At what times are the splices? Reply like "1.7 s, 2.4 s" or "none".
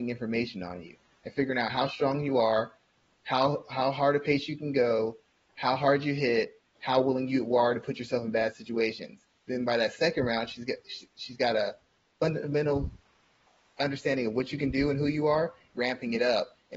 15.7 s